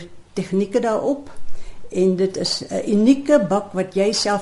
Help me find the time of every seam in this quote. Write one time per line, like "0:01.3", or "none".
none